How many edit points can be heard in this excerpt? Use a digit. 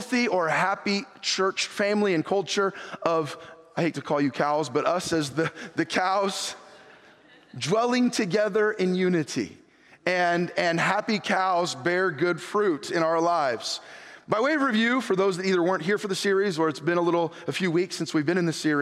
0